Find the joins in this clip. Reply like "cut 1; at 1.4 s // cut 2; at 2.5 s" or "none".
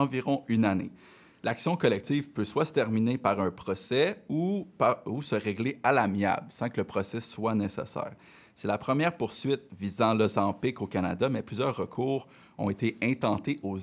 none